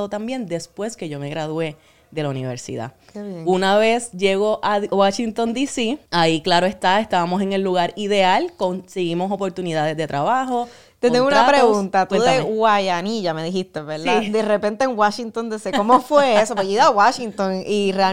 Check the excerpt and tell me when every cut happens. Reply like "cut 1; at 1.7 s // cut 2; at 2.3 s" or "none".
cut 1; at 6.1 s